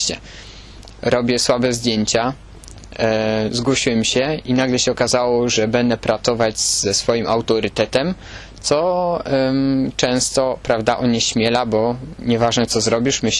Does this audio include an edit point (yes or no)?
no